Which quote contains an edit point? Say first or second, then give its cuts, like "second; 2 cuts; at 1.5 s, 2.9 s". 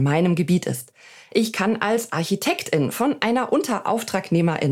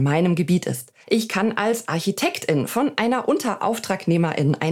second; 1 cut; at 1.0 s